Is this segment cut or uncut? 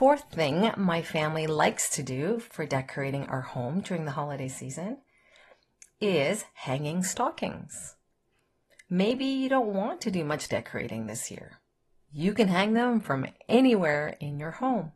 cut